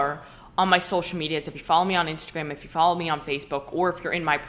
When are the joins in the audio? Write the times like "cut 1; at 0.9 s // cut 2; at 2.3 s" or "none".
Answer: none